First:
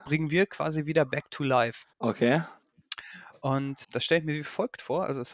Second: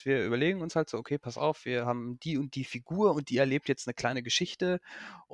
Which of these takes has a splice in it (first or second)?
first